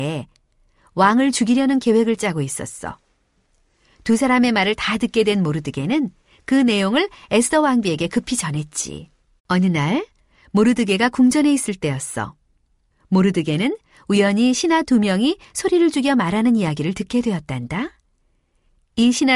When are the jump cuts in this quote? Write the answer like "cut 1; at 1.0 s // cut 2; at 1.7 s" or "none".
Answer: cut 1; at 9.4 s